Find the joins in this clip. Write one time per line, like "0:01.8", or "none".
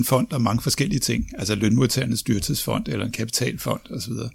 none